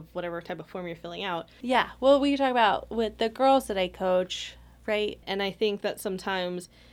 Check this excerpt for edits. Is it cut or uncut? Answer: cut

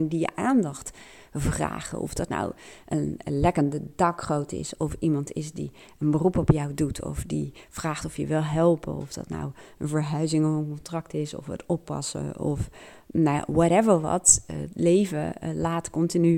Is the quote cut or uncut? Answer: uncut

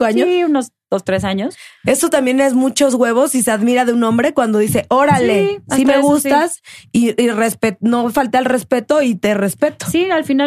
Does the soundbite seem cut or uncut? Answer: uncut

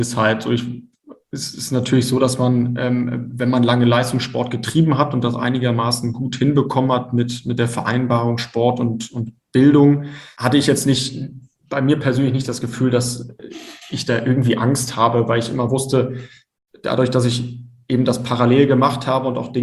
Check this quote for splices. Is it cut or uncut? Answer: uncut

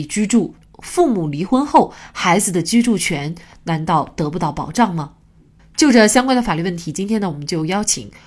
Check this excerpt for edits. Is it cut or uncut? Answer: uncut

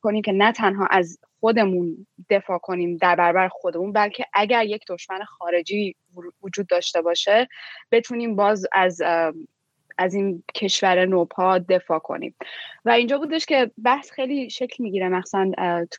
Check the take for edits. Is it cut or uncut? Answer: cut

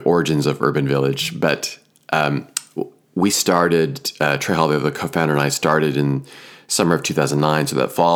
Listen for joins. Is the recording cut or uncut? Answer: uncut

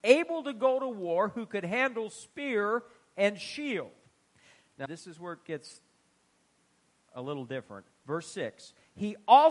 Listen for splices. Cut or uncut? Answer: cut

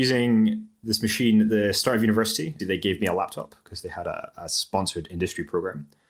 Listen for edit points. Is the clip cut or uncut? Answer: cut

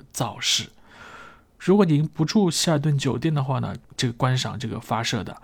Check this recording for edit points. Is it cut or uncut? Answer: cut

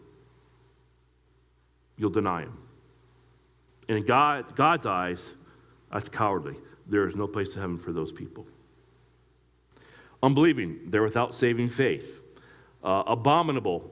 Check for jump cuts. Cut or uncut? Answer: uncut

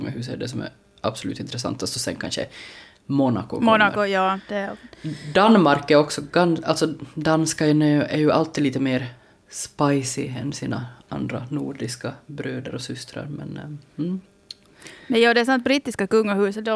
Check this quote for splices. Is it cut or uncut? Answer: uncut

